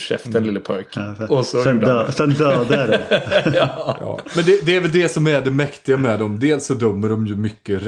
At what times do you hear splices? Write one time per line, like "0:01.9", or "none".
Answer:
none